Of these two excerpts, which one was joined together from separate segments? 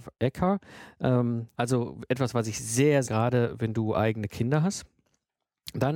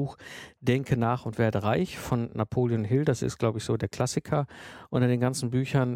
first; 2 cuts; at 1.5 s, 3.0 s

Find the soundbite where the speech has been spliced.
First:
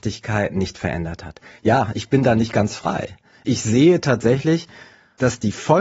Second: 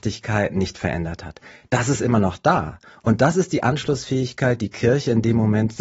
first; 1 cut; at 1.6 s

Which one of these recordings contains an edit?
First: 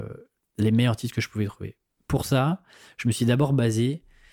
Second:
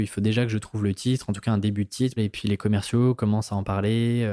second; 1 cut; at 2.2 s

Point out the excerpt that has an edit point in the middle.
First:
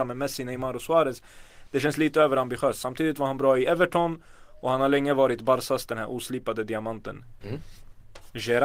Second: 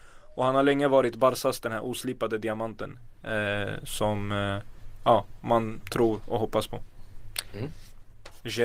first; 1 cut; at 7.4 s

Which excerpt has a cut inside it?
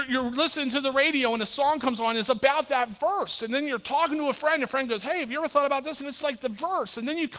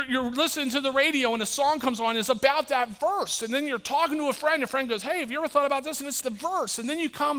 second; 1 cut; at 6.2 s

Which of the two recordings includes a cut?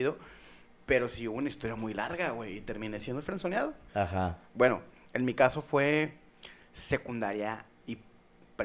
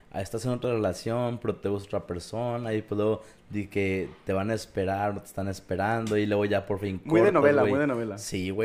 first; 1 cut; at 3.9 s

